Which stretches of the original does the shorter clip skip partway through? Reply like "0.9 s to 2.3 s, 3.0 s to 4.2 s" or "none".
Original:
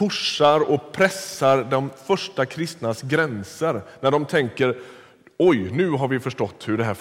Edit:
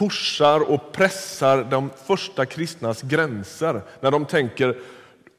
none